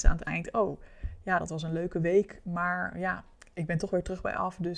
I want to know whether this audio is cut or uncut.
uncut